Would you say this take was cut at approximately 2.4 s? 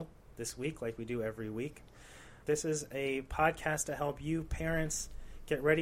yes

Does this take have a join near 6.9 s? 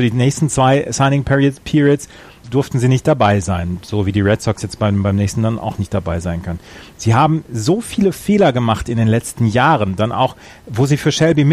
no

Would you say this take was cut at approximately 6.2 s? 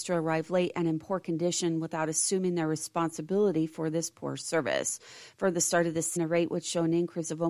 yes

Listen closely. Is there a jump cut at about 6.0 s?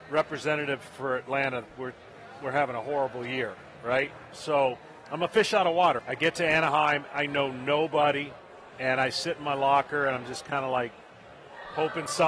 yes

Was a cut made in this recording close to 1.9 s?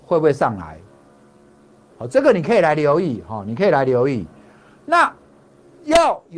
yes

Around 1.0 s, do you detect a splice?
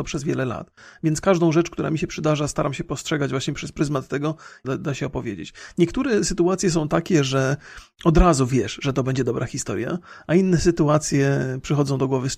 no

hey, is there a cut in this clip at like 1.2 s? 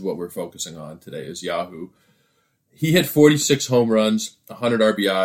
no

